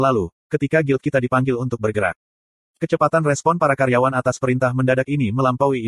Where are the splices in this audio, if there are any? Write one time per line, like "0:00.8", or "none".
0:02.7